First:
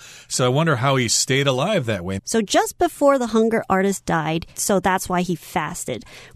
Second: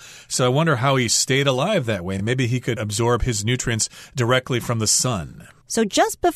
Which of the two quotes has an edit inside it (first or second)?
first